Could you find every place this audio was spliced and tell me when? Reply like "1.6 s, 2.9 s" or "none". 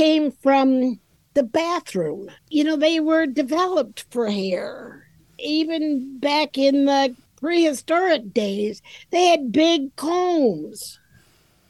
2.4 s